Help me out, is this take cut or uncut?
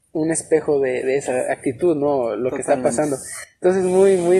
uncut